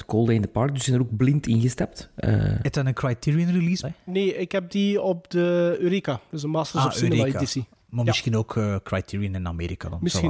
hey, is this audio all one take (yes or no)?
no